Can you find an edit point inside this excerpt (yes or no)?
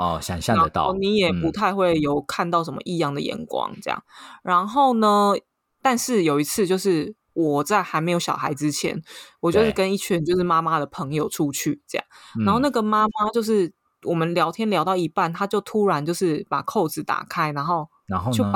yes